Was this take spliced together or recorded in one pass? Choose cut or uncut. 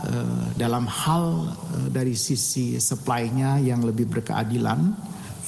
uncut